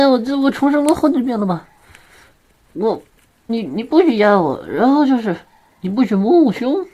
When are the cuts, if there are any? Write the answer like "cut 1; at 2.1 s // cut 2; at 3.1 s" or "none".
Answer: cut 1; at 3.5 s